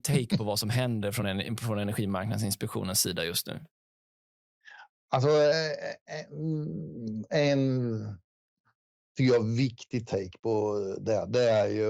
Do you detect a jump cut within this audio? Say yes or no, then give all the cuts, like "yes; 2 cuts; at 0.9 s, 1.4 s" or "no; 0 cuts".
no; 0 cuts